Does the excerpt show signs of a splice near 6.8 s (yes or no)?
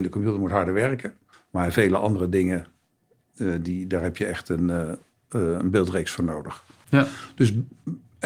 yes